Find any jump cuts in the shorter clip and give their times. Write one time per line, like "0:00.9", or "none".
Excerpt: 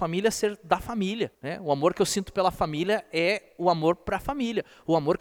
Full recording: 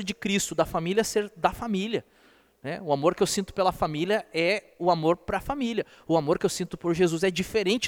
0:01.3